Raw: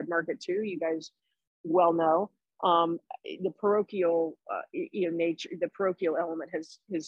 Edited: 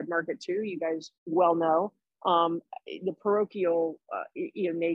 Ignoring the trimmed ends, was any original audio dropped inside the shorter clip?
yes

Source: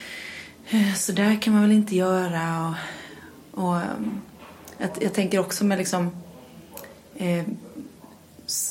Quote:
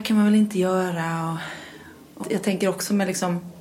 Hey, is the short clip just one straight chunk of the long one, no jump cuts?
no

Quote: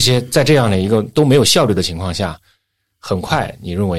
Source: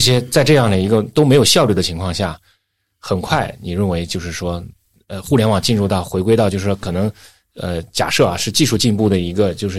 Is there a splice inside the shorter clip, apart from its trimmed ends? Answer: no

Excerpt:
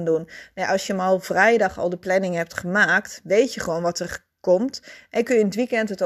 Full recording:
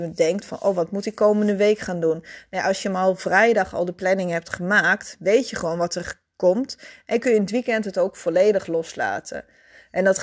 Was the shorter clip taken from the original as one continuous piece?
yes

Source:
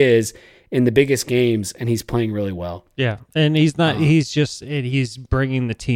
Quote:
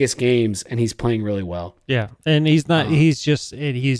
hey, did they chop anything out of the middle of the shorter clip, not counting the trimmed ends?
no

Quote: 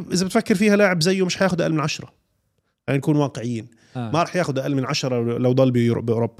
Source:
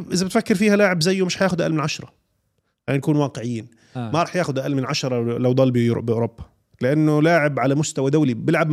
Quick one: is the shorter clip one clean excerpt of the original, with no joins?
yes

